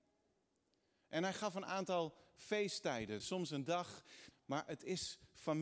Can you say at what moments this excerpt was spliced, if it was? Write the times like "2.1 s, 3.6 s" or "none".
3.2 s, 4.3 s